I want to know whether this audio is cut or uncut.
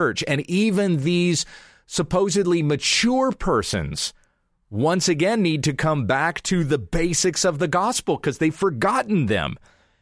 uncut